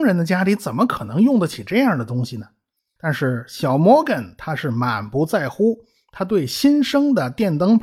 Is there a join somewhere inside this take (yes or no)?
yes